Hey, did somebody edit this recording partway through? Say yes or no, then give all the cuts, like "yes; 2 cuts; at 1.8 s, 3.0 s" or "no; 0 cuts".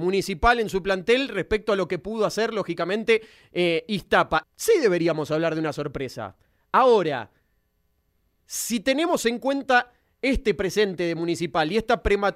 yes; 1 cut; at 4.4 s